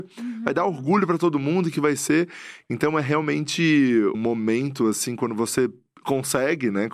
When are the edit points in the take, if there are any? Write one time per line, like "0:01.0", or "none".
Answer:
0:04.1